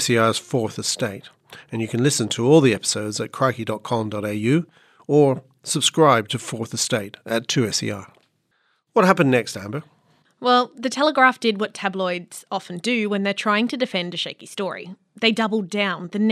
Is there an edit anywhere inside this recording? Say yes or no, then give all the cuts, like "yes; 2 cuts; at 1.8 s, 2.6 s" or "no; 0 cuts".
no; 0 cuts